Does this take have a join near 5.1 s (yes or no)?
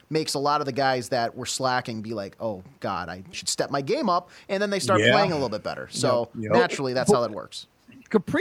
no